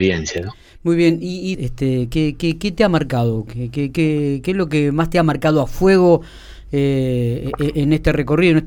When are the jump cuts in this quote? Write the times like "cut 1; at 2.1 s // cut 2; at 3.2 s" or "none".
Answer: cut 1; at 1.5 s